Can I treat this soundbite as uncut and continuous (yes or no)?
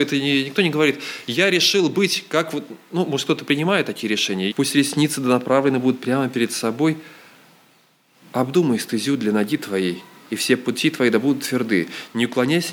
no